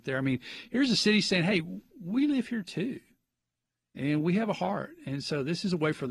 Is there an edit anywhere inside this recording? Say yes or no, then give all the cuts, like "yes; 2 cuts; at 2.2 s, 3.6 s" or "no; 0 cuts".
no; 0 cuts